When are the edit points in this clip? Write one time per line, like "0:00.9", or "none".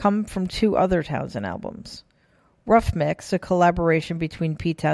none